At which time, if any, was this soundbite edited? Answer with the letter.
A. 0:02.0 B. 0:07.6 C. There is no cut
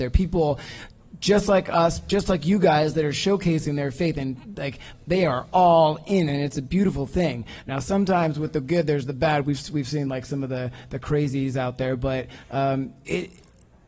C